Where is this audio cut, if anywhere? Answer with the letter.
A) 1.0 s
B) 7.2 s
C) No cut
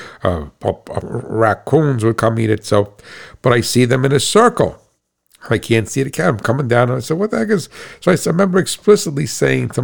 A